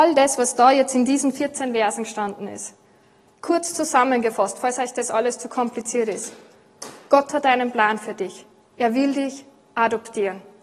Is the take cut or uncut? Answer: uncut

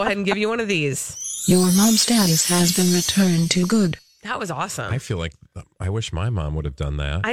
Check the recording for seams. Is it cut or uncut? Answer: uncut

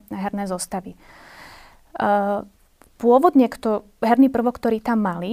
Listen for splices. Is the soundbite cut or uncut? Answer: uncut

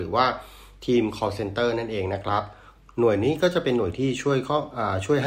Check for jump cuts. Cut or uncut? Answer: uncut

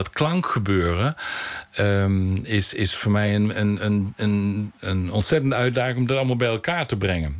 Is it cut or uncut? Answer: uncut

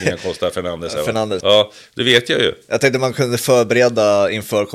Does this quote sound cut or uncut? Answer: cut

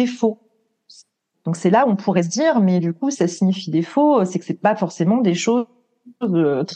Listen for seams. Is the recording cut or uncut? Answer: cut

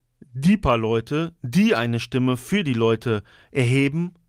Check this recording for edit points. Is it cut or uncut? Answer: uncut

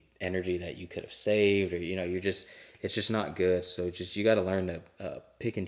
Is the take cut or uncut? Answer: uncut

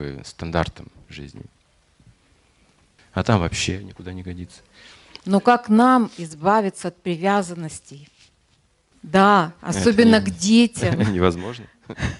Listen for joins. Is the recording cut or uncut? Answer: cut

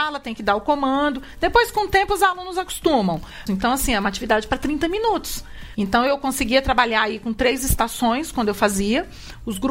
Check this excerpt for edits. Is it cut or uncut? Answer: cut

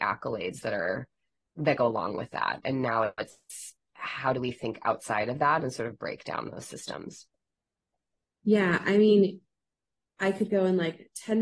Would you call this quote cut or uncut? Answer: uncut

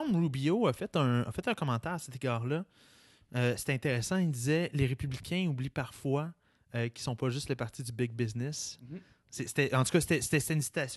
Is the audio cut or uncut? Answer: uncut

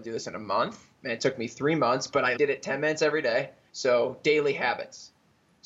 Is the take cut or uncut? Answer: cut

